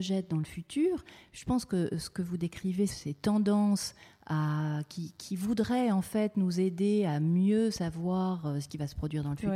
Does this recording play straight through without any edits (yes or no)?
no